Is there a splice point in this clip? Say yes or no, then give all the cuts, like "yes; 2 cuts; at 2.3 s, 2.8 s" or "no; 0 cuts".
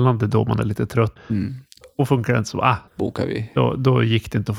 yes; 2 cuts; at 1.2 s, 2.9 s